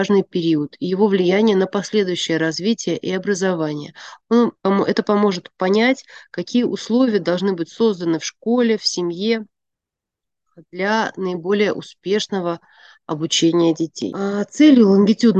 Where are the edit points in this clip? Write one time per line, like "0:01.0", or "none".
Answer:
0:04.6